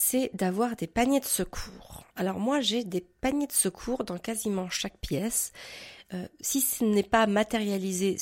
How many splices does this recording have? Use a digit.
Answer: 0